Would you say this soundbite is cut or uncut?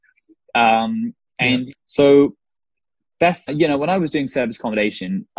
cut